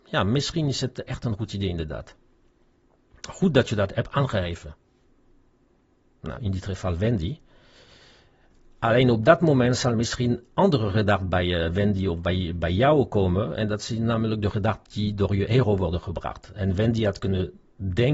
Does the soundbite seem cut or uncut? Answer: cut